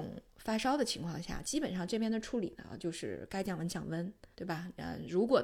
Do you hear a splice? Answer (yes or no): yes